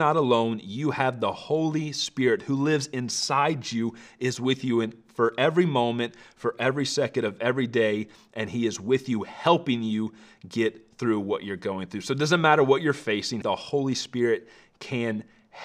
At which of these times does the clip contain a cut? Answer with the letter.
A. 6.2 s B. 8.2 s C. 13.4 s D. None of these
C